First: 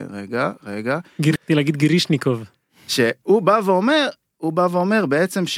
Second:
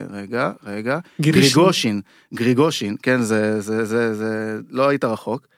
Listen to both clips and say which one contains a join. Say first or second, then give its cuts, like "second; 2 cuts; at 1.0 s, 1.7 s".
first; 1 cut; at 1.4 s